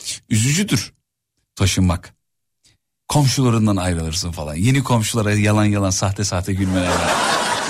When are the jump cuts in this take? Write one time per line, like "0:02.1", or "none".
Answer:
none